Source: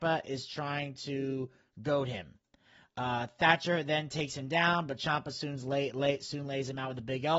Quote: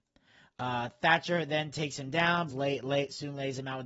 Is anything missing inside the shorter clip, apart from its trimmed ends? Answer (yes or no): yes